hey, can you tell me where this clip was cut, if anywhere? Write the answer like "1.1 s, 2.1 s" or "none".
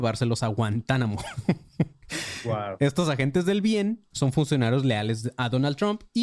4.1 s